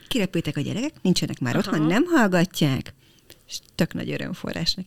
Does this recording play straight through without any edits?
yes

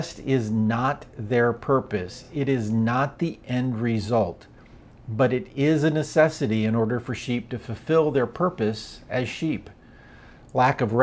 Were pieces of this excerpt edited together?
no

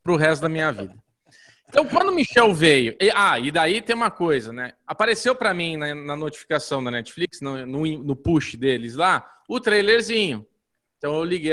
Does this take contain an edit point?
no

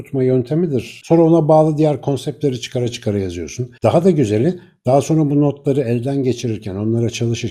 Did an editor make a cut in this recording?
yes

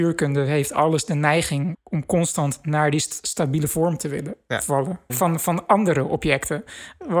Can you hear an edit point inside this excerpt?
yes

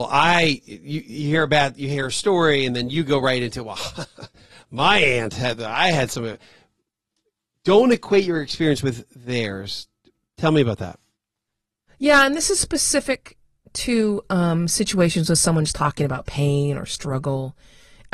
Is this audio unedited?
yes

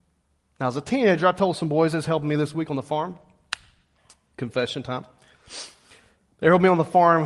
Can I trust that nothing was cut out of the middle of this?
yes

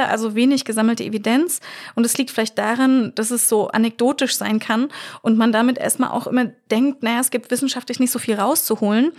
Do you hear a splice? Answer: no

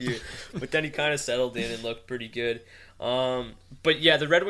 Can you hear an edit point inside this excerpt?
no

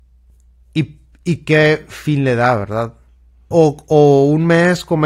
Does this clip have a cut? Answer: yes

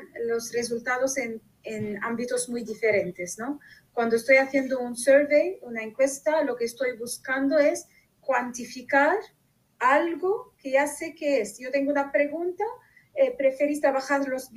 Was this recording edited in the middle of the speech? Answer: no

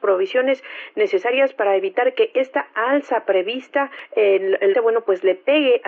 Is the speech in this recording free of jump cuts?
no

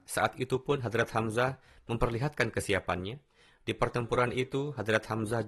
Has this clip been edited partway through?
no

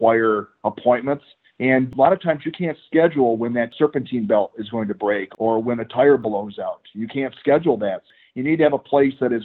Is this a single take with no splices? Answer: yes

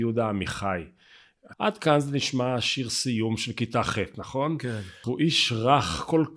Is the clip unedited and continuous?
no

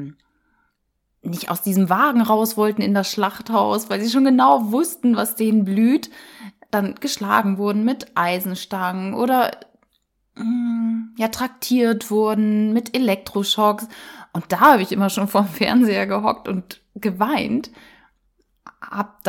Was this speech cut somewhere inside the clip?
no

